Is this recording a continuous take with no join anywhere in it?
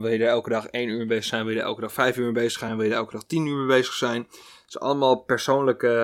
yes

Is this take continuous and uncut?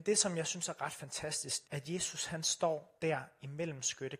no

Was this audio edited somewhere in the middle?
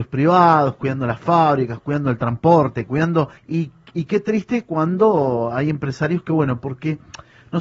yes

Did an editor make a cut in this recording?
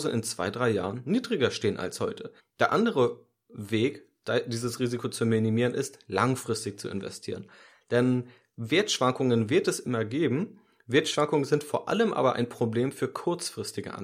yes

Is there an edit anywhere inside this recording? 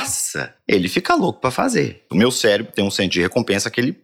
yes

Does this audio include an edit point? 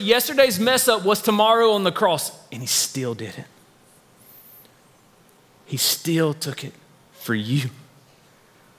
no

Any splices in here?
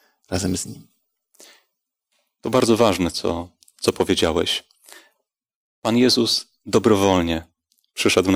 no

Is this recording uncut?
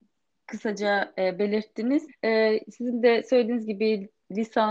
no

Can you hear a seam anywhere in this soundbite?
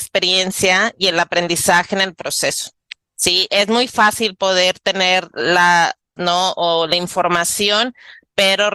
yes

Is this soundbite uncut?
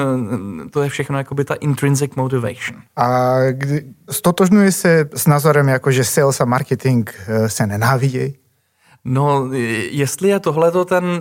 no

